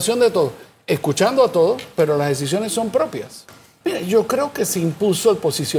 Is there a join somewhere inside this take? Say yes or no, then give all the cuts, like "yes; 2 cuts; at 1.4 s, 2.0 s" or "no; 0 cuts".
yes; 1 cut; at 3.8 s